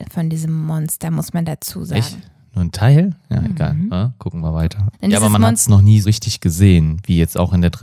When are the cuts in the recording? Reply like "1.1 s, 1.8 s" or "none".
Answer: 4.9 s, 6.0 s